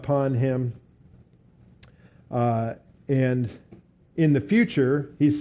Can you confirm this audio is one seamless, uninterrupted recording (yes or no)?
yes